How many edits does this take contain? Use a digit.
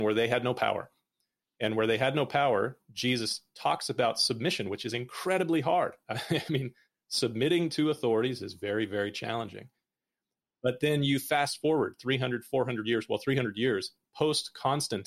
0